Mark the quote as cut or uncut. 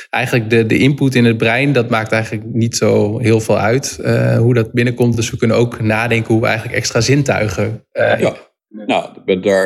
uncut